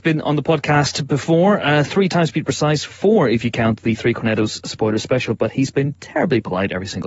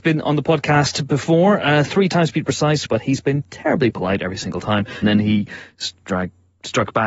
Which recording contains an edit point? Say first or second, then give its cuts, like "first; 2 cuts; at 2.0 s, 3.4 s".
second; 2 cuts; at 2.9 s, 5.0 s